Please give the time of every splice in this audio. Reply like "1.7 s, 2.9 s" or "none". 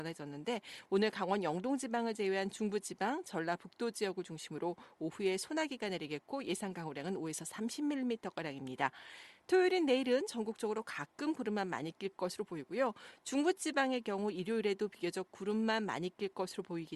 none